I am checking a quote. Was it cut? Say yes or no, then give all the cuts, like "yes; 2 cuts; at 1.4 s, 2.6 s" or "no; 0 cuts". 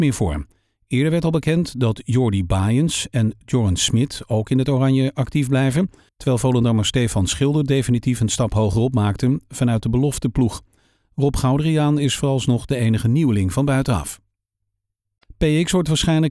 no; 0 cuts